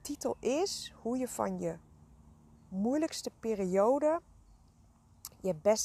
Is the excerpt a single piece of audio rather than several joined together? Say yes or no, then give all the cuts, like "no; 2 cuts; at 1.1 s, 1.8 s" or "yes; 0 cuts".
yes; 0 cuts